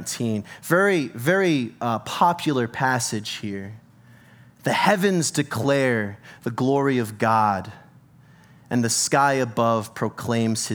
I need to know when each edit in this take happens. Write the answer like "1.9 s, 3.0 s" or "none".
none